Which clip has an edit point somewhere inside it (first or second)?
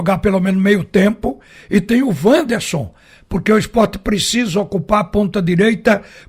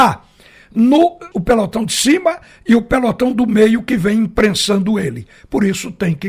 second